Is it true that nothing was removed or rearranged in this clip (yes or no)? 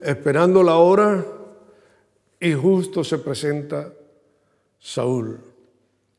yes